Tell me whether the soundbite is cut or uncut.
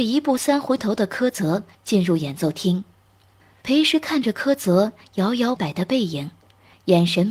cut